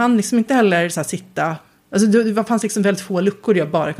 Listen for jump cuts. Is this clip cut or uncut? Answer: uncut